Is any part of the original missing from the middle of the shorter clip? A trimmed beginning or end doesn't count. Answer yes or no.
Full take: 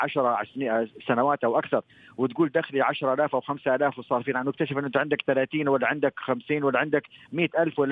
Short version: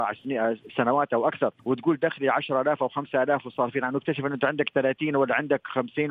yes